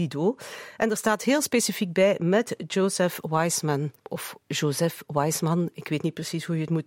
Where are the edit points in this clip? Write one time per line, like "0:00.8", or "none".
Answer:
0:04.0